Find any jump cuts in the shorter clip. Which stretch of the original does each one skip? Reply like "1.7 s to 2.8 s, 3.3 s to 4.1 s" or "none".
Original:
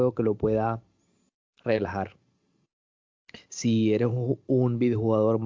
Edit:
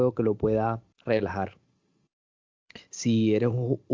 0.9 s to 1.5 s